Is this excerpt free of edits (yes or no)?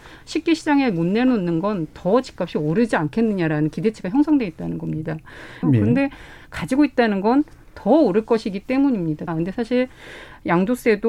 no